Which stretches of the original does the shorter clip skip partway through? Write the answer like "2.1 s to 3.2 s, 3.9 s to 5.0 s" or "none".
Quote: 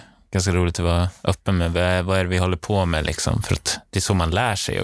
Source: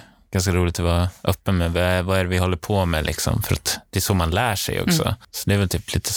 none